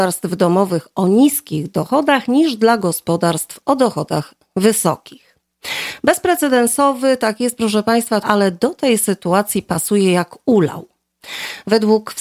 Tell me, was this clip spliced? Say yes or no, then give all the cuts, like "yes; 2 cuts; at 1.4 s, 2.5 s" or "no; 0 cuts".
yes; 1 cut; at 8.2 s